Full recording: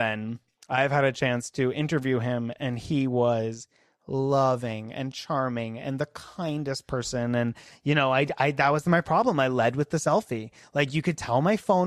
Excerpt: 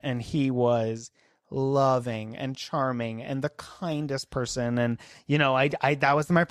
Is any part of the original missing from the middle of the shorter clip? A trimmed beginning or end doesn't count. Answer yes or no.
no